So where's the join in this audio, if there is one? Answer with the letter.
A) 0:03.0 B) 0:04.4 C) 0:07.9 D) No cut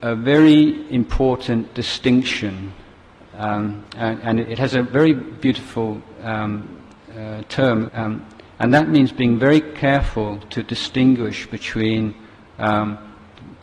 C